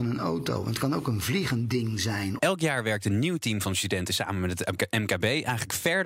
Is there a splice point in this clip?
yes; 1 cut; at 2.4 s

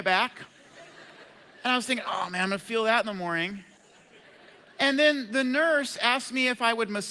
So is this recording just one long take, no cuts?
yes; 0 cuts

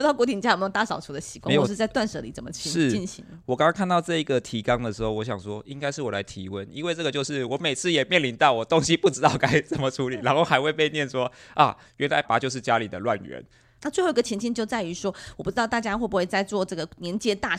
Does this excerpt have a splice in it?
yes; 2 cuts; at 12.2 s, 13.8 s

